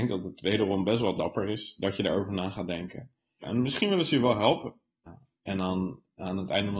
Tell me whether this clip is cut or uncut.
cut